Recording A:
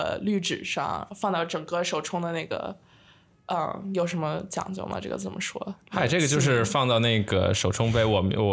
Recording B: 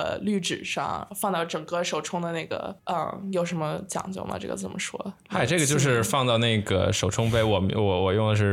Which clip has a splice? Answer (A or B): B